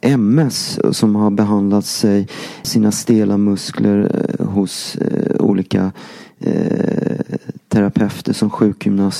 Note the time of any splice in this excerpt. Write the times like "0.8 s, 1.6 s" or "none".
2.6 s